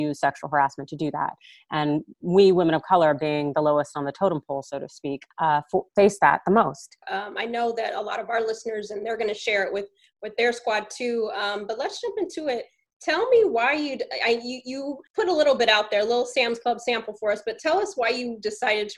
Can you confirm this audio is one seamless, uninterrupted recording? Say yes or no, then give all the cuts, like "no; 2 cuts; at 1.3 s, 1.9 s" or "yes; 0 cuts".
no; 3 cuts; at 5.3 s, 7.0 s, 15.1 s